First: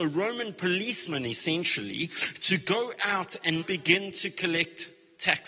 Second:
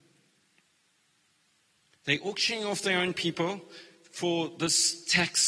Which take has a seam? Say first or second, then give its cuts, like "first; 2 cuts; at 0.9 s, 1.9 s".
first; 1 cut; at 3.6 s